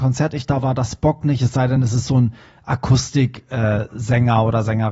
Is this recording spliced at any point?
no; 0 cuts

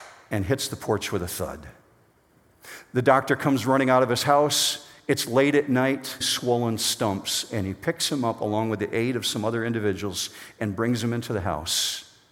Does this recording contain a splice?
yes; 1 cut; at 6.2 s

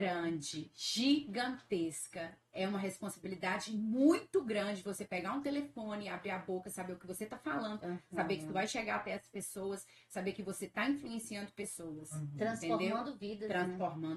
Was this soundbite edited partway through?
no; 0 cuts

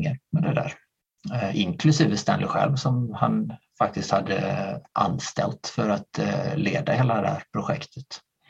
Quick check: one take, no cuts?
yes; 0 cuts

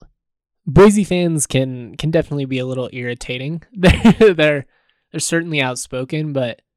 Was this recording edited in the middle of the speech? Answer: no; 0 cuts

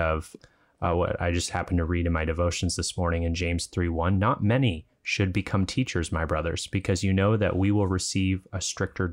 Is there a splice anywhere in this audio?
no; 0 cuts

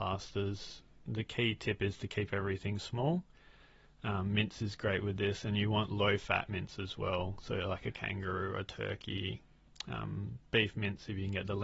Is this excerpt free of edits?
yes; 0 cuts

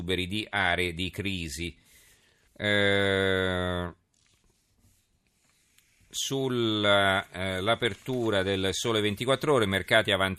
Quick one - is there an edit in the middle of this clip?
yes; 1 cut; at 2.5 s

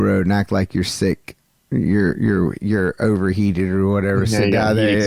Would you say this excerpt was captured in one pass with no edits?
yes; 0 cuts

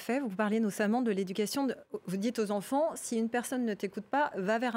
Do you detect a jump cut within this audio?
no; 0 cuts

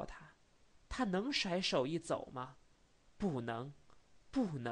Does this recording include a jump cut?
no; 0 cuts

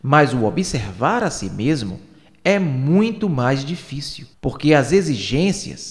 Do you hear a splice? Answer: yes; 1 cut; at 4.3 s

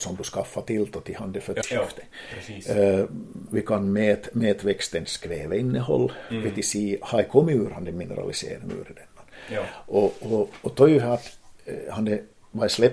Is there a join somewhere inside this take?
yes; 2 cuts; at 1.6 s, 3.5 s

